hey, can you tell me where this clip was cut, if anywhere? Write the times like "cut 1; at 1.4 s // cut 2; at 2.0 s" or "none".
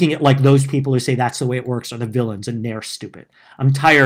none